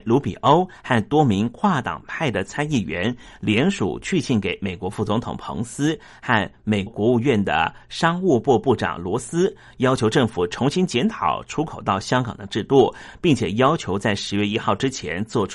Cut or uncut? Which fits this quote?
cut